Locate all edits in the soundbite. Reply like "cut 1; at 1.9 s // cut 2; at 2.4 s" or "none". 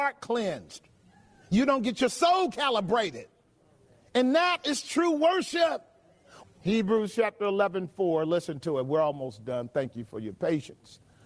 cut 1; at 6.4 s